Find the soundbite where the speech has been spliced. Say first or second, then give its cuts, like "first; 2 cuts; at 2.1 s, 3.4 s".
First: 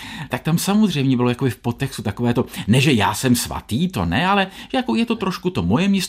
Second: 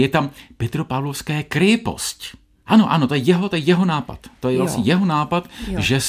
second; 1 cut; at 2.7 s